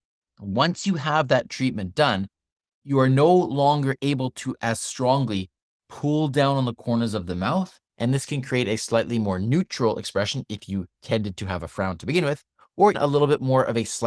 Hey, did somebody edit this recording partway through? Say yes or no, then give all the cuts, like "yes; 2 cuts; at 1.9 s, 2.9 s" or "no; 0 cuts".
yes; 2 cuts; at 7.9 s, 12.9 s